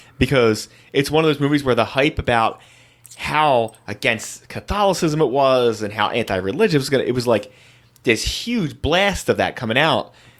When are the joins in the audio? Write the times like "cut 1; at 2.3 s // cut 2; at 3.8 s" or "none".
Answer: none

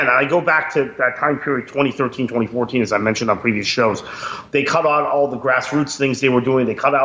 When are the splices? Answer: none

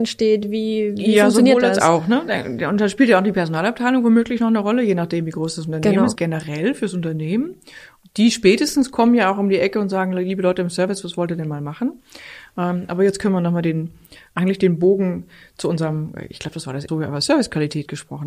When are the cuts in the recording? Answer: cut 1; at 6.2 s // cut 2; at 16.9 s

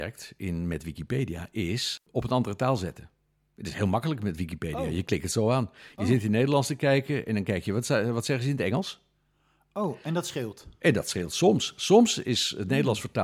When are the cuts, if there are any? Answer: cut 1; at 2.0 s

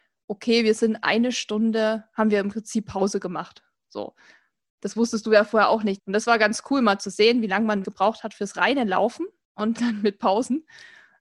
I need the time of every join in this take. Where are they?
cut 1; at 6.0 s // cut 2; at 7.8 s // cut 3; at 9.8 s

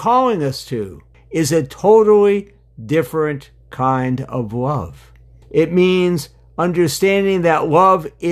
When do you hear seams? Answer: cut 1; at 1.1 s // cut 2; at 5.4 s

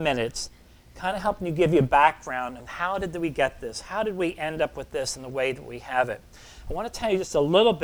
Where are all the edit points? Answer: none

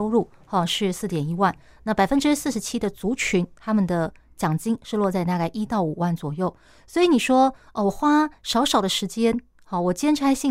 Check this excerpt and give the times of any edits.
none

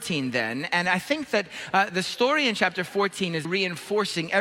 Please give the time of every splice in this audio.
cut 1; at 1.9 s // cut 2; at 3.4 s

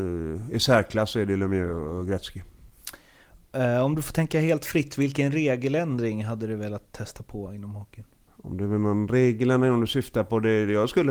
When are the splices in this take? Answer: none

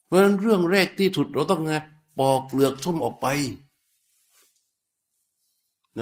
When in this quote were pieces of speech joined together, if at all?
cut 1; at 3.0 s

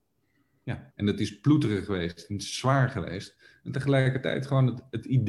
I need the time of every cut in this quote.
cut 1; at 0.9 s

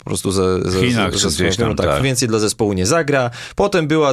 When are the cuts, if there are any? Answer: cut 1; at 2.0 s

